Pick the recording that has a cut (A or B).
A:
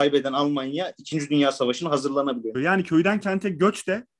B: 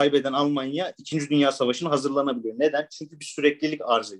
A